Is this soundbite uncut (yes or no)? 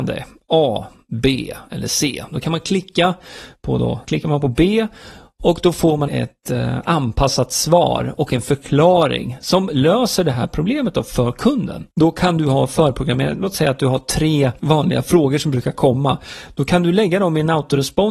no